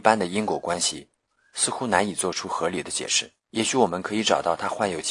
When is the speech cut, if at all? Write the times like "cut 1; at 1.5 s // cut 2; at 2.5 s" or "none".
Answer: cut 1; at 3.4 s